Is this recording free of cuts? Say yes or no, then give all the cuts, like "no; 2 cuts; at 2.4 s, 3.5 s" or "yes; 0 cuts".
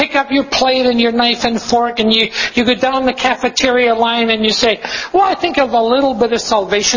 yes; 0 cuts